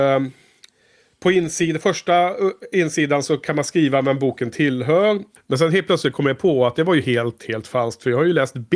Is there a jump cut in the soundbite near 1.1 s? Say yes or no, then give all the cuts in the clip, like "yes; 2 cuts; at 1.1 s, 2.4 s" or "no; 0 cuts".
no; 1 cut; at 5.4 s